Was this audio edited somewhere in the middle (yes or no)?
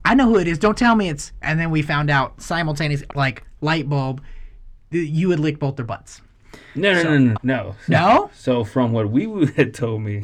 yes